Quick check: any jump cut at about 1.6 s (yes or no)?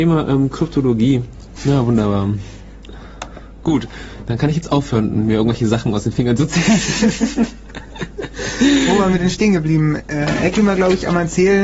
yes